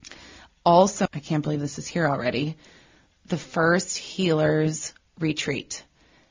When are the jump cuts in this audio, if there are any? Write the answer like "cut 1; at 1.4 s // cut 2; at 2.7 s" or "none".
cut 1; at 1.1 s